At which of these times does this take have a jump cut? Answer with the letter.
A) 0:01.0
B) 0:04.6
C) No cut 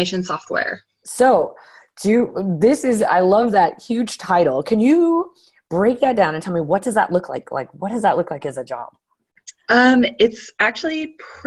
A